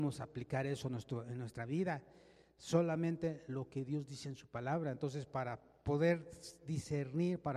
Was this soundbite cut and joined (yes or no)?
no